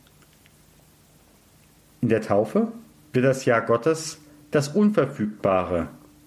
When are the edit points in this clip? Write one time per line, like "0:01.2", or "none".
0:03.0